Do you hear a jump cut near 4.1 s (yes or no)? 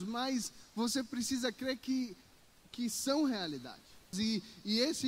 yes